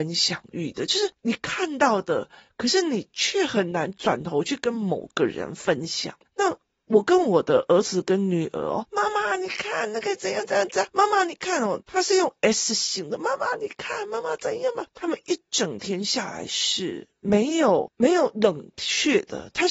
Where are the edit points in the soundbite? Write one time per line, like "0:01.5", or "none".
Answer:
0:11.8